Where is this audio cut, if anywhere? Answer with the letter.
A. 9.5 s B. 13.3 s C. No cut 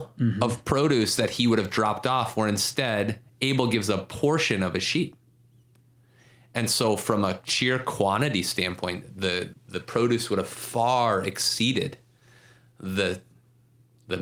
A